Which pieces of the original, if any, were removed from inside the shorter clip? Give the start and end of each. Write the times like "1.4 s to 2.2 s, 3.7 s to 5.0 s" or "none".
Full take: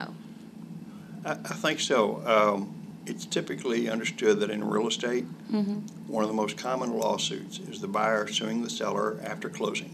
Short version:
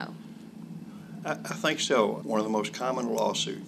2.2 s to 6.1 s